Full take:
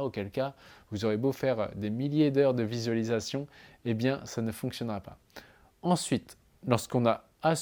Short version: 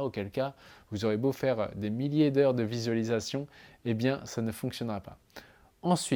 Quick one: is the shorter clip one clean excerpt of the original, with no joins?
yes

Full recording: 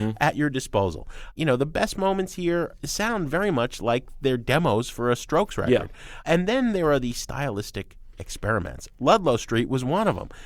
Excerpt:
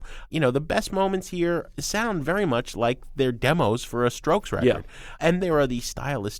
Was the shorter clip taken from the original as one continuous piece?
no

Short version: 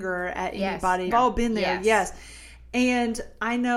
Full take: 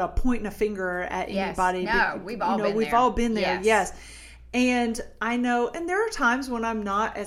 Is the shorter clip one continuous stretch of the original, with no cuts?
no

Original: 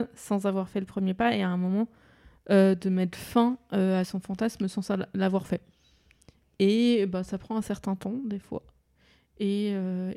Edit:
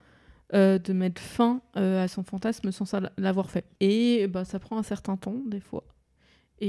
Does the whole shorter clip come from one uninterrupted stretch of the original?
no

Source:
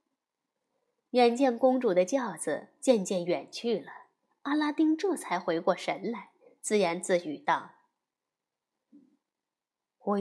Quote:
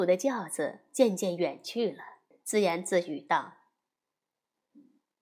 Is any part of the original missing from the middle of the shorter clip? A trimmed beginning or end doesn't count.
yes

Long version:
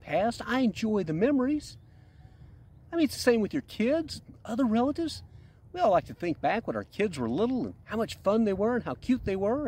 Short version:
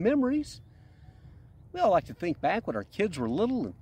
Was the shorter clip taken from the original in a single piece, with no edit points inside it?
no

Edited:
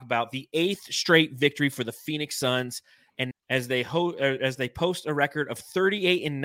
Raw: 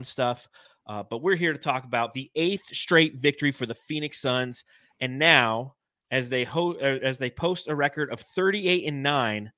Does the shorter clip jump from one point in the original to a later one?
yes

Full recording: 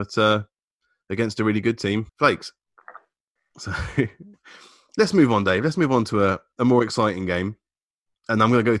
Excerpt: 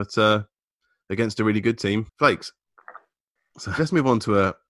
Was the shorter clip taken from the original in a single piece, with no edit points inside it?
no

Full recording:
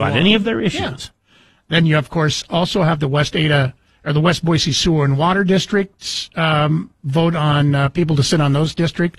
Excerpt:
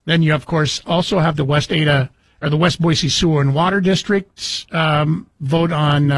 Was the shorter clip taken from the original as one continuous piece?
yes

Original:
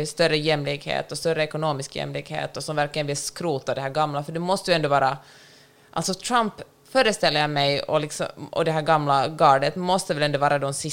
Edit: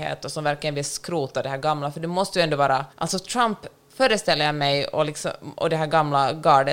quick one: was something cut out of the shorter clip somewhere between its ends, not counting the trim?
yes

